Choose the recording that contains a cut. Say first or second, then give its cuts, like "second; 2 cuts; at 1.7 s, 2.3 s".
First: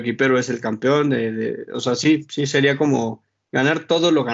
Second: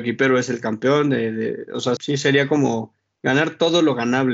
second; 1 cut; at 2.0 s